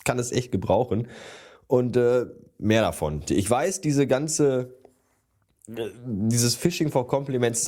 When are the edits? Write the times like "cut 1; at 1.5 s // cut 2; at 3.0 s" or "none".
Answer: cut 1; at 3.3 s